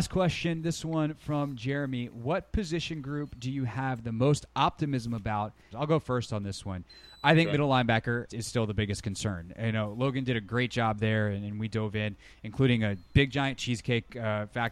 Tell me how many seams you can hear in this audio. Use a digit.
2